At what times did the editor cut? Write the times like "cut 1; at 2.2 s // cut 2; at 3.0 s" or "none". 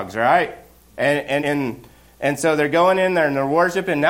cut 1; at 1.4 s